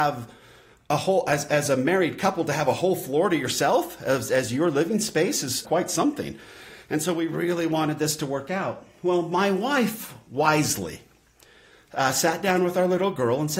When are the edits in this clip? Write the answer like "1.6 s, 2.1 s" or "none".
5.6 s

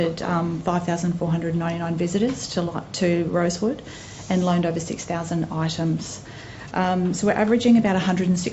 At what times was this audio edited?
6.7 s

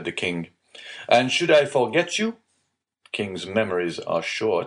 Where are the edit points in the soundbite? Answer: none

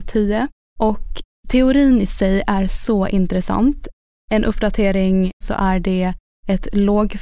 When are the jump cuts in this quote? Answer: 5.4 s

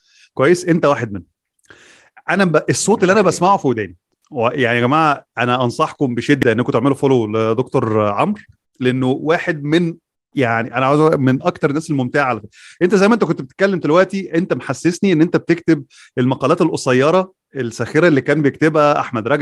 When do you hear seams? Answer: none

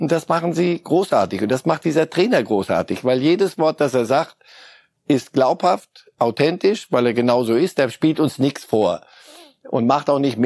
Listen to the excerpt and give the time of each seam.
none

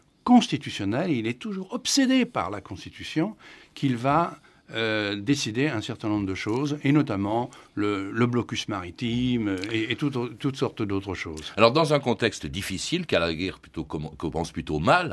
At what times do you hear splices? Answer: none

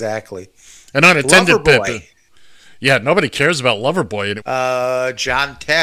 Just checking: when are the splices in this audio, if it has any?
4.4 s

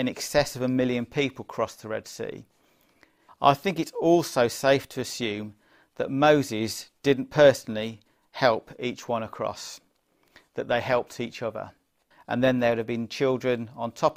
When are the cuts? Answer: 3.3 s, 12.1 s

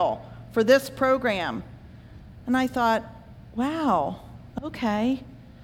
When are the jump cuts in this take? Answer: none

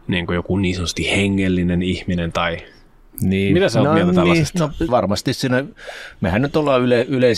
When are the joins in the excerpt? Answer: 4.9 s

